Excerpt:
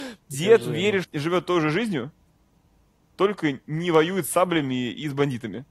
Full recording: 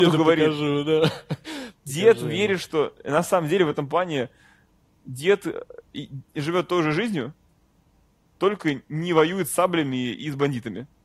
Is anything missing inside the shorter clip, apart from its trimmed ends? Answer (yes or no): yes